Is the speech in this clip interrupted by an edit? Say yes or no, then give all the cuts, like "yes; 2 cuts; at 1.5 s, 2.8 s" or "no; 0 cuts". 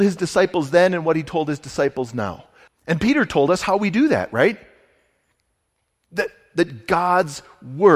yes; 1 cut; at 2.7 s